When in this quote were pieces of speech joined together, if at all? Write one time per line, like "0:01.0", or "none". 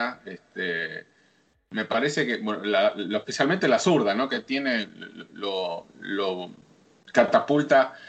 none